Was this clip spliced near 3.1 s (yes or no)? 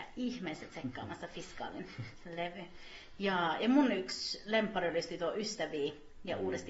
no